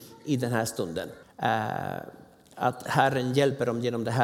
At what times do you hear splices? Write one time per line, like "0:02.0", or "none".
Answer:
0:01.2